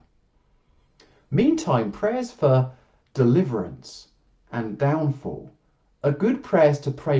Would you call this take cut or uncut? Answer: uncut